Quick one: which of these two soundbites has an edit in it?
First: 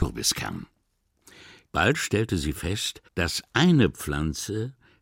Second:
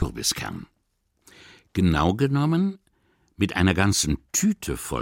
first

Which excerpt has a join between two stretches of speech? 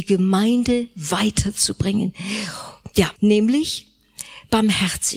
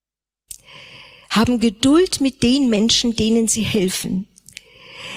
first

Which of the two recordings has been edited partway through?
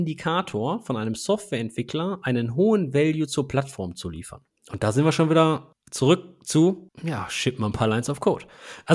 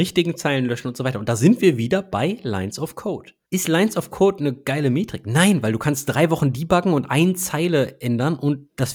second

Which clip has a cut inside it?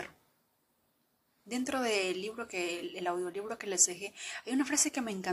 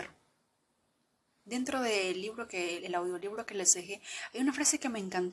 second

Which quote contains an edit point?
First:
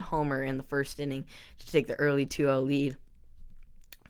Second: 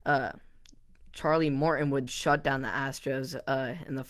second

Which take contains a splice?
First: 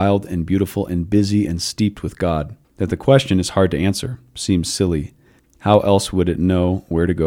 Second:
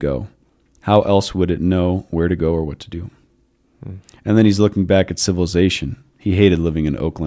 first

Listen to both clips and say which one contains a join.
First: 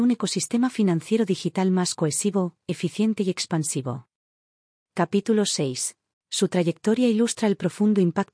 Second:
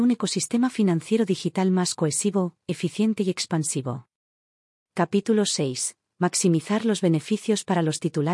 first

